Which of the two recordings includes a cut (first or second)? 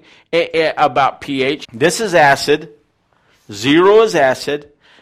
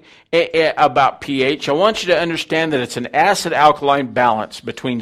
first